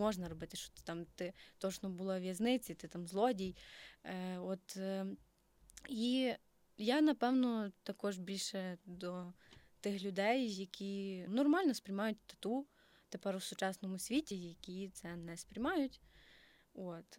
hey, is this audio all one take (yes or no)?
no